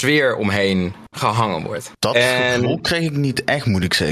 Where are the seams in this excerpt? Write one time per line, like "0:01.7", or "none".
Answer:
0:02.0